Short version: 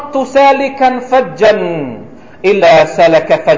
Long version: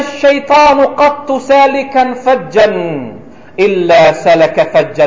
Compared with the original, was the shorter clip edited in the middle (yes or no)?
yes